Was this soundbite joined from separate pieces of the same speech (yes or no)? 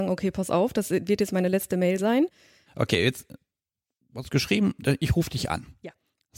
yes